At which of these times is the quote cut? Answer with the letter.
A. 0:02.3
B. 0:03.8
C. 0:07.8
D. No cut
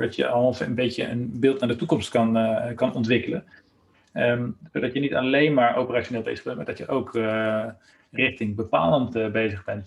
D